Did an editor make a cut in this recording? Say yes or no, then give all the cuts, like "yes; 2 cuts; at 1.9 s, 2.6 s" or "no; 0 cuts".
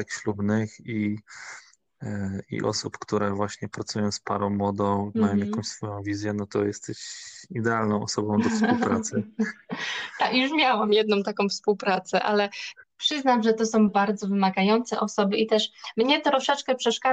yes; 1 cut; at 13.9 s